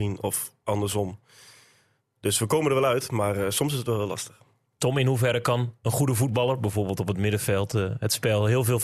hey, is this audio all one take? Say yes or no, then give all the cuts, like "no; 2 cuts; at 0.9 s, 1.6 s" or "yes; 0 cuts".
yes; 0 cuts